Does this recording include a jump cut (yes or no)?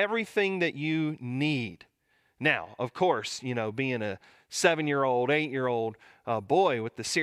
no